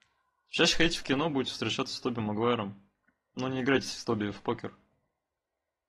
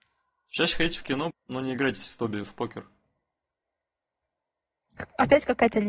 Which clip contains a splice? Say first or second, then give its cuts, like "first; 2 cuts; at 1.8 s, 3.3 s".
second; 1 cut; at 1.3 s